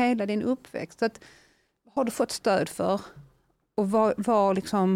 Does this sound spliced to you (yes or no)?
no